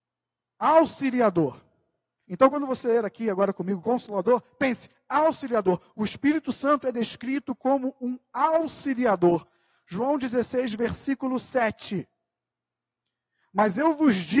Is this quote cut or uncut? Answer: uncut